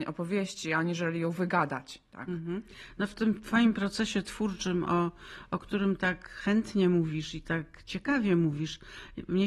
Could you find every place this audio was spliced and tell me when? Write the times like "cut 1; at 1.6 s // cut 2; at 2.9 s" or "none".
none

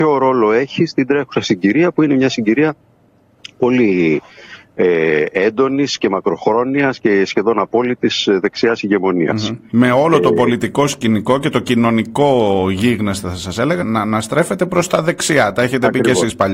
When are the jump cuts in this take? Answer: cut 1; at 13.8 s

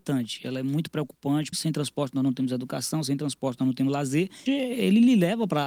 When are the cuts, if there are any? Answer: cut 1; at 1.5 s // cut 2; at 4.5 s

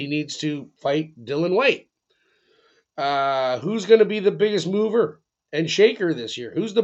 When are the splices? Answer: none

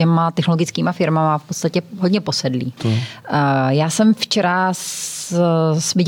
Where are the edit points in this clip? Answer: cut 1; at 2.8 s

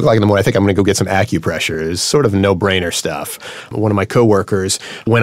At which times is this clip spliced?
none

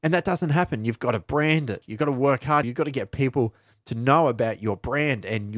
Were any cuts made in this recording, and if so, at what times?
cut 1; at 2.6 s

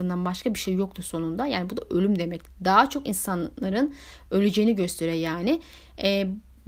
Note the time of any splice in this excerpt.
cut 1; at 2.5 s

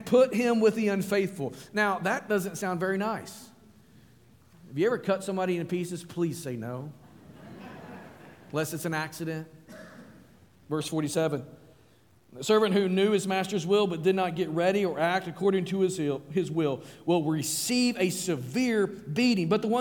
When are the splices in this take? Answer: cut 1; at 10.6 s

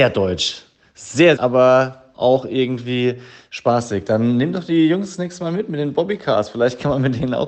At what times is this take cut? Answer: cut 1; at 1.4 s

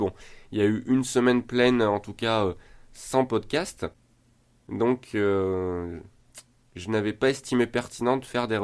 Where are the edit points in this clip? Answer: none

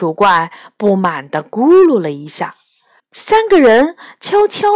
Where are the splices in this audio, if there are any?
cut 1; at 3.0 s

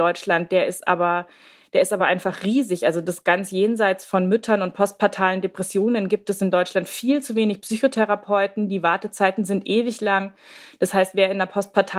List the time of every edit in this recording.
none

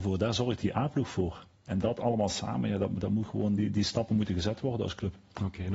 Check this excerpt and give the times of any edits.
none

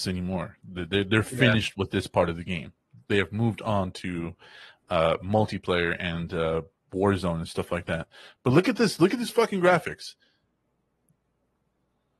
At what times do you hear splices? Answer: none

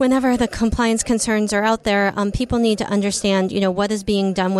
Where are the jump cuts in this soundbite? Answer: none

